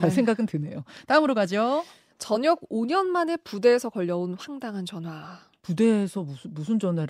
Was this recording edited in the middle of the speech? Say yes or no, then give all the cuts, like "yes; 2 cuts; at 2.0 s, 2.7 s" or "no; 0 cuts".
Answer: no; 0 cuts